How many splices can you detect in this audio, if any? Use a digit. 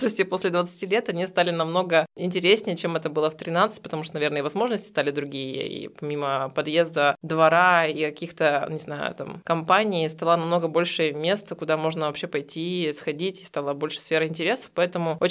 0